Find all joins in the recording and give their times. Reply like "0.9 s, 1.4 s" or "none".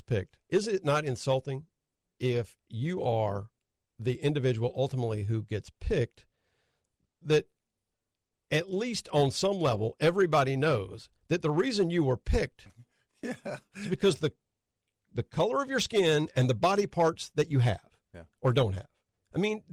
none